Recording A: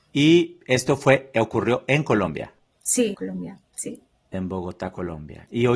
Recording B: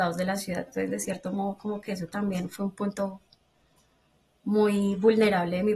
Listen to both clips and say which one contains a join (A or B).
A